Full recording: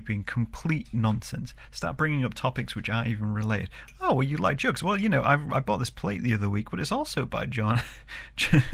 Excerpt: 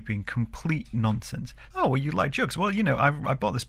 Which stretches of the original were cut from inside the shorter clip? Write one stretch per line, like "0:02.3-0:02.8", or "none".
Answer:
0:01.7-0:04.0

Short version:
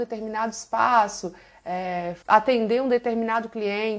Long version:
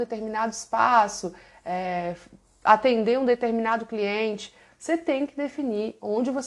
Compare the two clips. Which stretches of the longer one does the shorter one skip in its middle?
0:02.2-0:02.6

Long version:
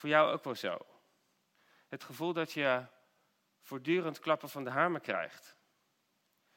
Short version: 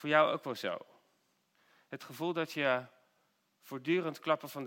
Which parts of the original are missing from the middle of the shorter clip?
none

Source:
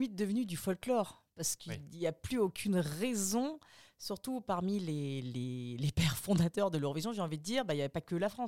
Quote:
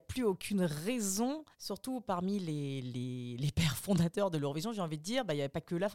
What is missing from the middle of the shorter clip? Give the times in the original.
0:03.7-0:03.9

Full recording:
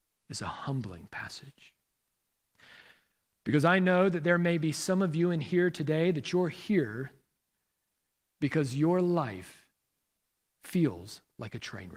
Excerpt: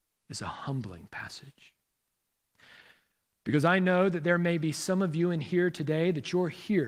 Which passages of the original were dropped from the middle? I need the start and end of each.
none

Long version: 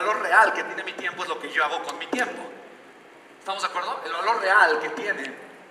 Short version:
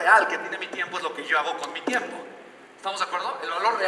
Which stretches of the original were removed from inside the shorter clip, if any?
0:03.0-0:03.3

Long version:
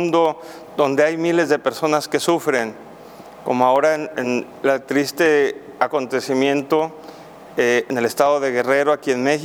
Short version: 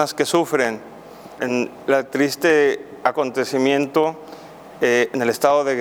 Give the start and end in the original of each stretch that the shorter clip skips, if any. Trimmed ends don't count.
0:03.3-0:04.1

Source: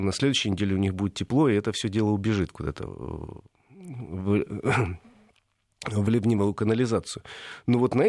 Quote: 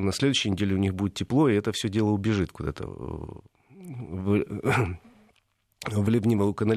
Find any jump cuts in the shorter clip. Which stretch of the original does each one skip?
none

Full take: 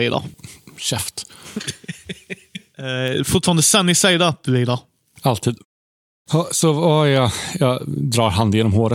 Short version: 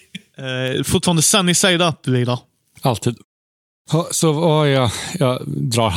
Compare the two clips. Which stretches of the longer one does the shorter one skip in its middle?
none

